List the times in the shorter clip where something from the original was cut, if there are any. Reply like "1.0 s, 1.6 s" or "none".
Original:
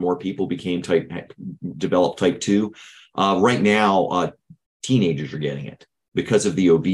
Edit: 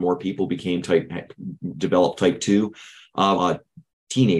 3.4 s